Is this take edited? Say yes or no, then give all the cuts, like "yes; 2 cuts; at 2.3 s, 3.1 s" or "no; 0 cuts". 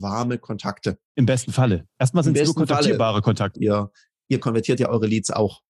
yes; 2 cuts; at 1.0 s, 3.5 s